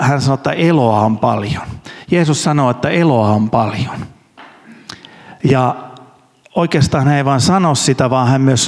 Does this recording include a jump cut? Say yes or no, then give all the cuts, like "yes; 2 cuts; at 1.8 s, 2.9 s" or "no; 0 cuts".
no; 0 cuts